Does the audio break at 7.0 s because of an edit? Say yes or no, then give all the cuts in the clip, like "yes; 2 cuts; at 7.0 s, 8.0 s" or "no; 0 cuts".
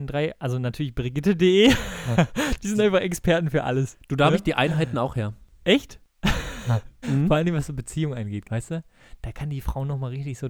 yes; 2 cuts; at 7.0 s, 8.4 s